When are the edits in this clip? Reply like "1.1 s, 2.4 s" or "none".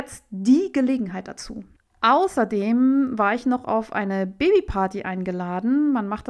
none

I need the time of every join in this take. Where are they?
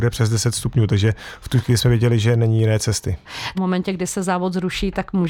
3.5 s

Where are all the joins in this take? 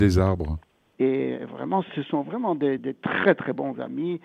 0.9 s, 2.8 s

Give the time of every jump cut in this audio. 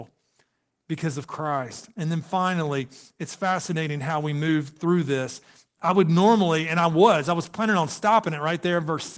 none

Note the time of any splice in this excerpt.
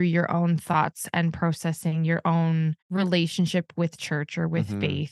2.8 s

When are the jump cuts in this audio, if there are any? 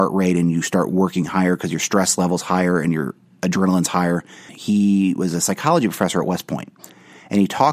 4.5 s

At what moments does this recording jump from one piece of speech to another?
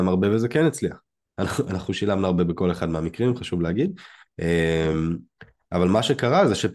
none

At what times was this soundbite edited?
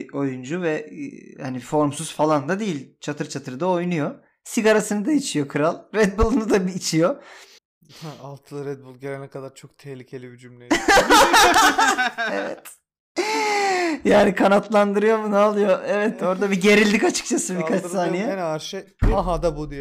7.6 s

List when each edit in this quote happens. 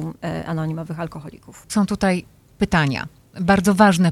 1.7 s

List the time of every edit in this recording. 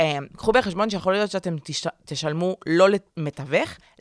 3.1 s

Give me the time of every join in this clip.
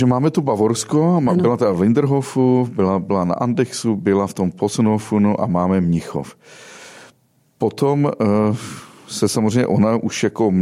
none

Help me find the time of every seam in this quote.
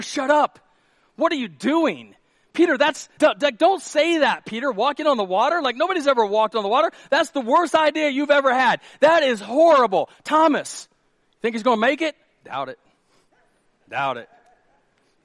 3.2 s

